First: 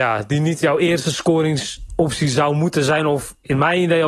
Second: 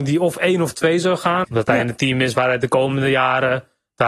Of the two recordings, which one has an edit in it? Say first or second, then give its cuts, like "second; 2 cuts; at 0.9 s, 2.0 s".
second; 1 cut; at 1.4 s